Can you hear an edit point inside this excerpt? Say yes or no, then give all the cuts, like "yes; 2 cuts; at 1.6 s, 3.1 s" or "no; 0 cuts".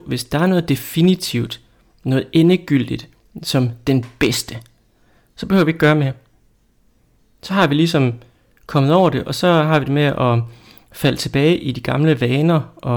no; 0 cuts